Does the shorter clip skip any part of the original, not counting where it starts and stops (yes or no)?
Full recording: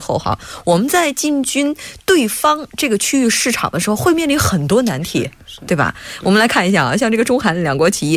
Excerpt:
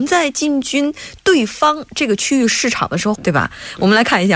yes